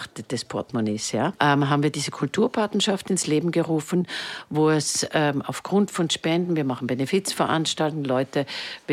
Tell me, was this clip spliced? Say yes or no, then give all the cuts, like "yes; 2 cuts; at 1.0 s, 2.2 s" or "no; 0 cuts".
yes; 1 cut; at 1.3 s